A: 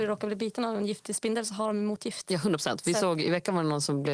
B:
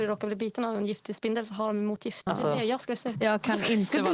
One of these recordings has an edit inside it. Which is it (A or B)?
B